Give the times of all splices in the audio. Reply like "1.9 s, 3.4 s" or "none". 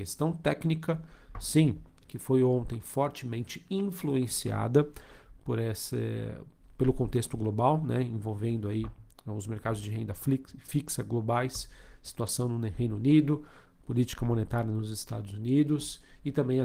2.0 s